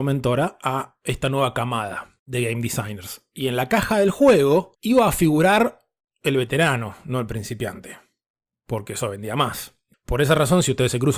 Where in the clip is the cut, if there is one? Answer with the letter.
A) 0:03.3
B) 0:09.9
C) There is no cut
B